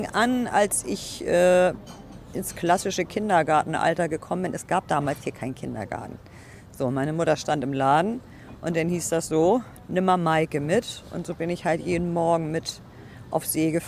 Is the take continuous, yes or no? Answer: yes